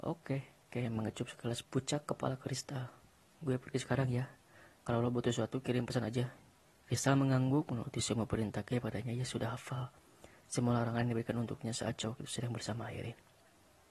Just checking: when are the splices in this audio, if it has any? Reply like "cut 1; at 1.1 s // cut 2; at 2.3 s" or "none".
cut 1; at 1.6 s // cut 2; at 6.7 s